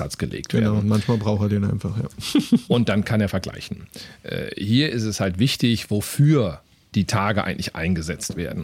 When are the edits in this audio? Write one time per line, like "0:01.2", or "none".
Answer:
none